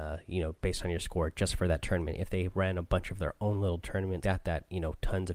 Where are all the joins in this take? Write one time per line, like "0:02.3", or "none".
0:04.2